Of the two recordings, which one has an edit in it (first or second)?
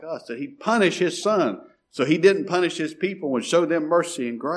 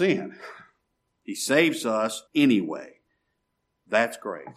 second